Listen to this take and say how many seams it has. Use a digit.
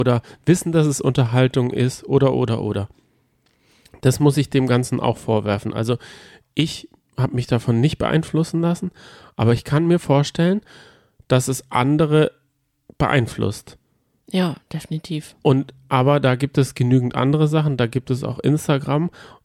0